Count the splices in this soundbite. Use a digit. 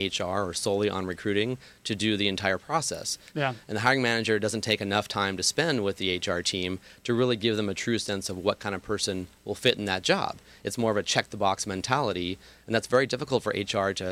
1